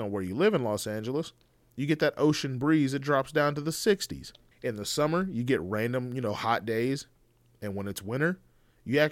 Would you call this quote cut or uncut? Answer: cut